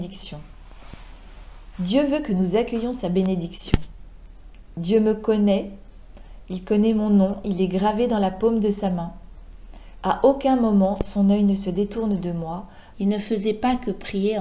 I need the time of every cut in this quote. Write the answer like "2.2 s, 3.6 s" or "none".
12.9 s